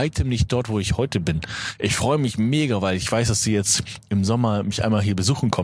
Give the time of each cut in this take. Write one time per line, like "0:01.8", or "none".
none